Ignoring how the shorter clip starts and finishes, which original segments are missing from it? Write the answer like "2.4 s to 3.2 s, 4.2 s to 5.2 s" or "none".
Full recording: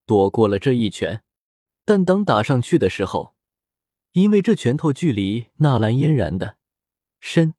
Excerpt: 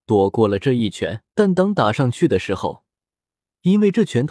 1.3 s to 1.8 s